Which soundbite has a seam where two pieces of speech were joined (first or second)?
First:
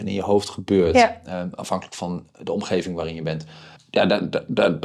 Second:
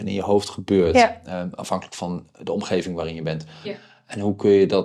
second